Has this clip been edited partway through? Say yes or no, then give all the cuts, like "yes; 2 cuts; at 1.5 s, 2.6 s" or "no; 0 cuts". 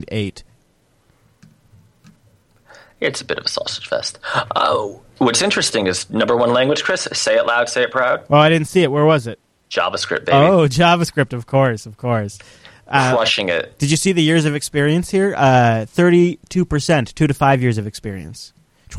no; 0 cuts